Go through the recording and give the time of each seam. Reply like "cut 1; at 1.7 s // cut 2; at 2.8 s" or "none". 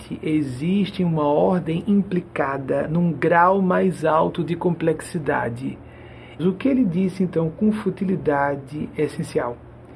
cut 1; at 6.4 s